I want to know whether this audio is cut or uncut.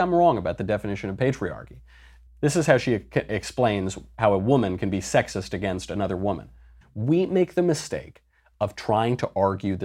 cut